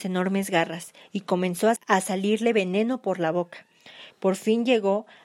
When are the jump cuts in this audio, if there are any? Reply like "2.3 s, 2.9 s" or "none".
1.8 s, 4.1 s